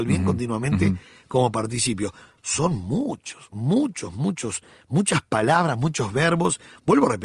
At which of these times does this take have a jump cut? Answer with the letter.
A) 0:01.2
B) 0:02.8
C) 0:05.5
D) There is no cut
D